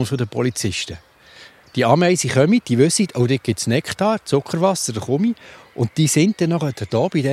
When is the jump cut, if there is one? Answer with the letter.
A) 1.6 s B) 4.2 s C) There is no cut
C